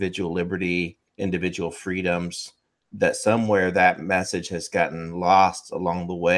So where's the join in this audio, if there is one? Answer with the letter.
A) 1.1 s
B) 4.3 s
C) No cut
A